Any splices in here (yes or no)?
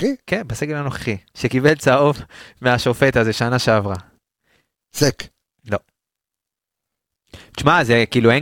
yes